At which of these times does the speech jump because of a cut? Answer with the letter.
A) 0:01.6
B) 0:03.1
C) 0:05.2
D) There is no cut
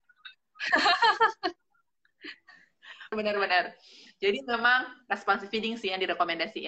B